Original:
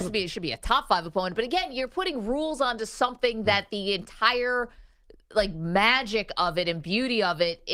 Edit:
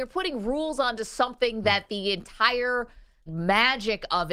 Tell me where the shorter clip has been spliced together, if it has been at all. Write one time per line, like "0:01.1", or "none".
0:03.3

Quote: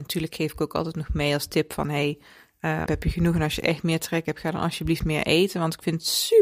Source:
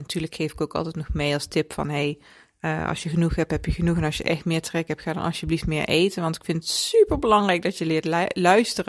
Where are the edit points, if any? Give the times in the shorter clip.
0:02.9

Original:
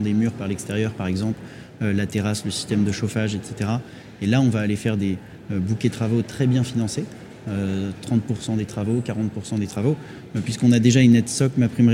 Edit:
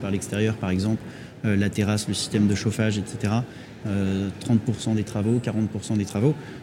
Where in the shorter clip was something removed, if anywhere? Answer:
0:03.8

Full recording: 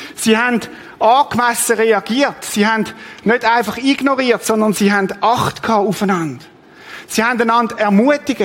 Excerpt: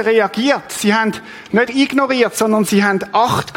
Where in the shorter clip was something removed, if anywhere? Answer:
0:01.7

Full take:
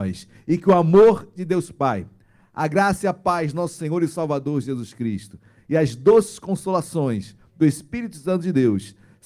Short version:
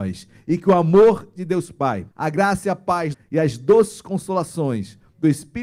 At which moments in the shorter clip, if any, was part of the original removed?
0:02.1
0:03.1

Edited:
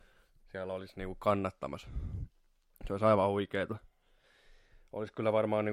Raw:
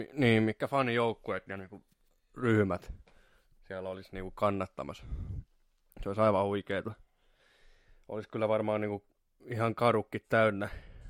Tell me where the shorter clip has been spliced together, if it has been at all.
none

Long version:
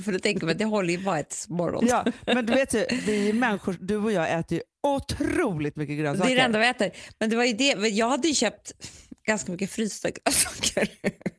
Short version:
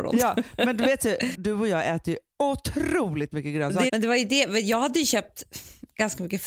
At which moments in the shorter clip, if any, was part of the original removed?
0:01.3
0:03.9

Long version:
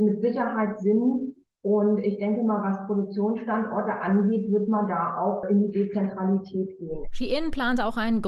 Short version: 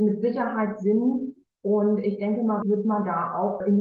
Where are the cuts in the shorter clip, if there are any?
0:02.6

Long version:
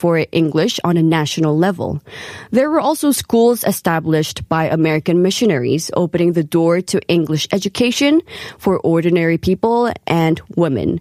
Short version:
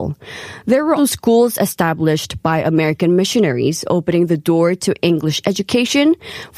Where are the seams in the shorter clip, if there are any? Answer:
0:01.0

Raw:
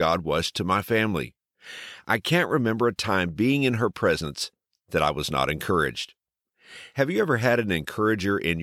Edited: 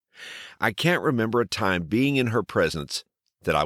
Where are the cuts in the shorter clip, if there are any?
none

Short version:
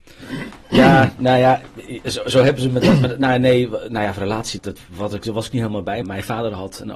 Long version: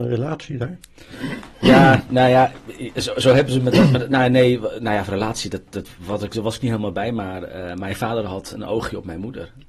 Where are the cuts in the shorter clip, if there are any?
0:04.6
0:06.0

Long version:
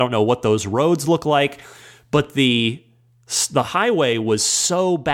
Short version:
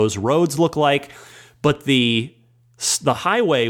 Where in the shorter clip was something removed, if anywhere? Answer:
none

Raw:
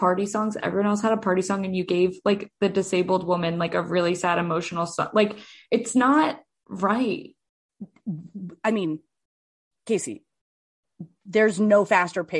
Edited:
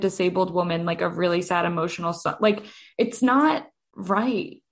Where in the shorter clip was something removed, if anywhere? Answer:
none

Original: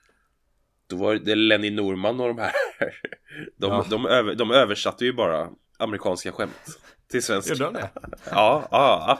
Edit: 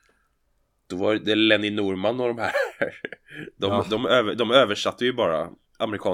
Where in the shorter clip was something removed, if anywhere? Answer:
none

